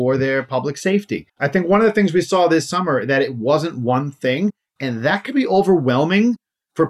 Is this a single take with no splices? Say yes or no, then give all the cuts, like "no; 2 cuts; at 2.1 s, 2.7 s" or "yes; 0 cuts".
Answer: no; 1 cut; at 1.3 s